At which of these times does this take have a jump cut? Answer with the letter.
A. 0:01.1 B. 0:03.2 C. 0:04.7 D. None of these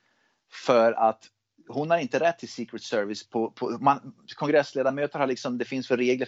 D